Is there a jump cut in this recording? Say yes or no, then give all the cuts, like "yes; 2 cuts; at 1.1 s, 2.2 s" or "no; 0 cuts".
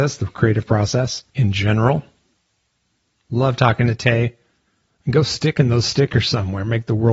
yes; 2 cuts; at 1.3 s, 4.9 s